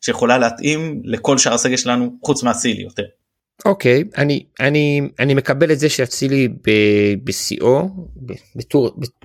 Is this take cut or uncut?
uncut